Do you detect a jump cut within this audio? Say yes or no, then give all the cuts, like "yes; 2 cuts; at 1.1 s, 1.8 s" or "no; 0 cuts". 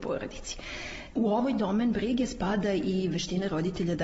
yes; 1 cut; at 1.1 s